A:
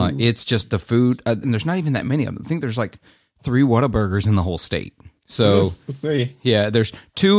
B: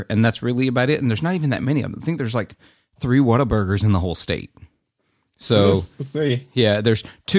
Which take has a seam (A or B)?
A